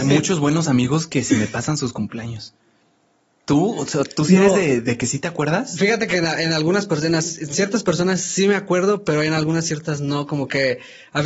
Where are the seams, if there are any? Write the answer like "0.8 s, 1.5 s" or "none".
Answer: none